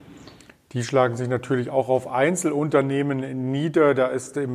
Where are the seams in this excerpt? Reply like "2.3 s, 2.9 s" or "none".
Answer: none